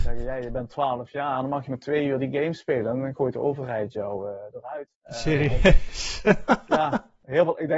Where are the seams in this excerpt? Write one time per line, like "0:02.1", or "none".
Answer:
0:05.0